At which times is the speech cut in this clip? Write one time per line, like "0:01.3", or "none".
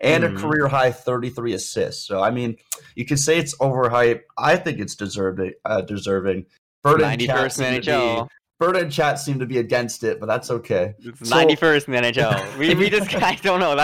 none